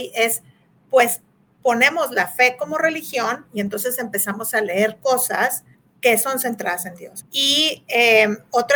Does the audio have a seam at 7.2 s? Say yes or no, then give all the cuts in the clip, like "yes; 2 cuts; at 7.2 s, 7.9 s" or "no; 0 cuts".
yes; 1 cut; at 7.2 s